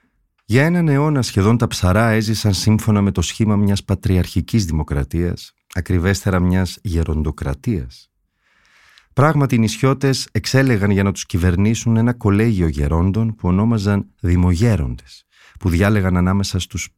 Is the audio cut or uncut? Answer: uncut